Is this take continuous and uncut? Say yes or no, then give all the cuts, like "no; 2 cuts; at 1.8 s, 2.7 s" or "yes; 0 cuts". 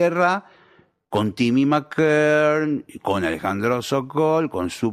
yes; 0 cuts